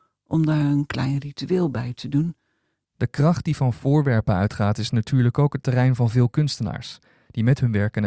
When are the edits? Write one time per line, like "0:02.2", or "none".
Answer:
0:02.8